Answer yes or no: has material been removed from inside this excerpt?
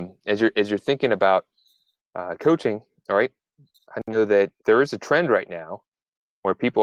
yes